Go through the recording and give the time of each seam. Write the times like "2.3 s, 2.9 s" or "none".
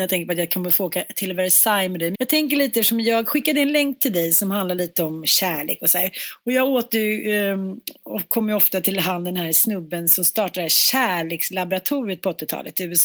2.1 s